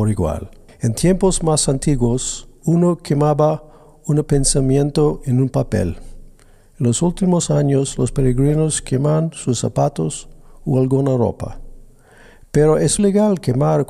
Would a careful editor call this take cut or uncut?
cut